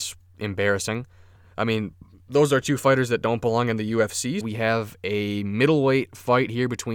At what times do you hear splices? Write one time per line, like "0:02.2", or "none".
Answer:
0:01.4
0:04.4